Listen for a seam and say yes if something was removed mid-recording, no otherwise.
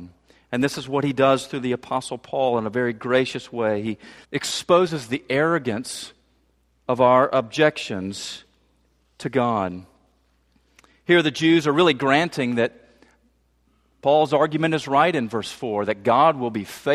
yes